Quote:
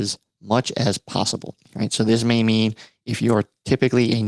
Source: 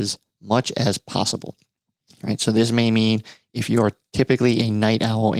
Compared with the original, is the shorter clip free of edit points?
no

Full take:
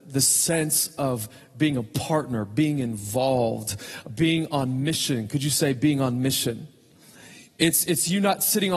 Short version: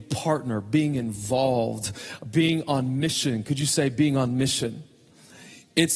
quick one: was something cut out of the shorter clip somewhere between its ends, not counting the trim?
no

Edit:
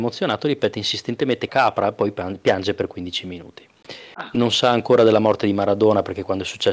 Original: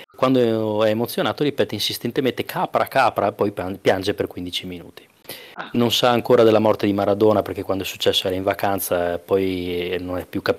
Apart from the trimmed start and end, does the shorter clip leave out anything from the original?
yes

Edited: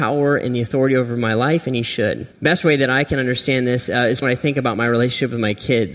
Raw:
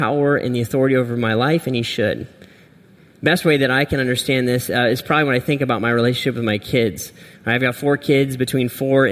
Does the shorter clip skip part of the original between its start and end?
yes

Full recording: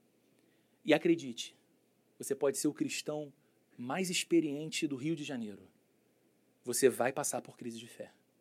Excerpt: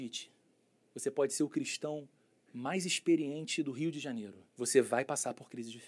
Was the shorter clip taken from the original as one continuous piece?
no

